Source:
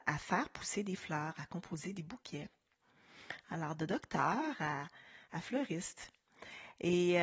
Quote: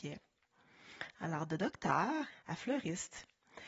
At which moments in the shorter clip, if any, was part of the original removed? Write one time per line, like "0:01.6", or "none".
0:02.3